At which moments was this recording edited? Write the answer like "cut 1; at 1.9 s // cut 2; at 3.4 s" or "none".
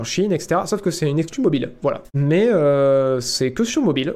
cut 1; at 2.1 s